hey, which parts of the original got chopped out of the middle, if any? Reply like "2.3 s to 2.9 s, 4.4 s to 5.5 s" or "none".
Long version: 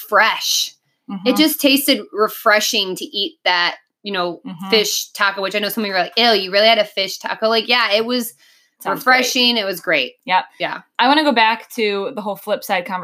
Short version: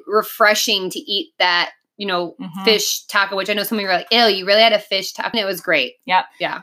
7.4 s to 9.5 s